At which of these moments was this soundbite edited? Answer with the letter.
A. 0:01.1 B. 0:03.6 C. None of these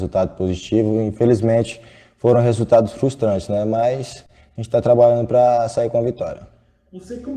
C